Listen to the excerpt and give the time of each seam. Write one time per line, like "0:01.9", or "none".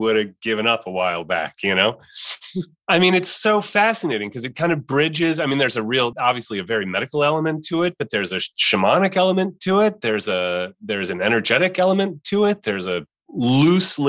0:06.1